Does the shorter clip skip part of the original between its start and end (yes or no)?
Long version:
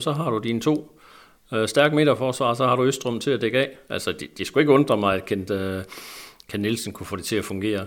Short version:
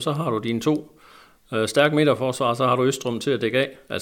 no